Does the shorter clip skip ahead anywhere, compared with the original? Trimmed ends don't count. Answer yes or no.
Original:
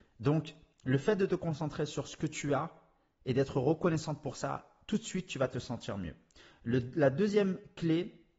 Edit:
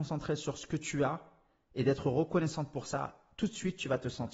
no